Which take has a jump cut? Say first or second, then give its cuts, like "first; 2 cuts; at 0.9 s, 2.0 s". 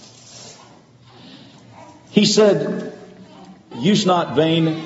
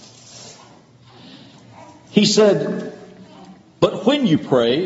first; 1 cut; at 3.7 s